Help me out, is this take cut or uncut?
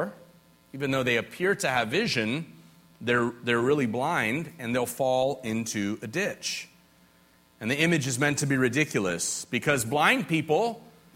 uncut